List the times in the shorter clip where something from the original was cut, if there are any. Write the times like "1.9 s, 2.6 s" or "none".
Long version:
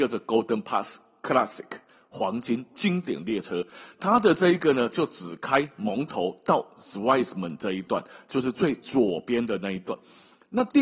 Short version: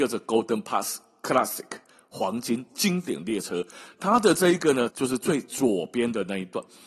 4.9 s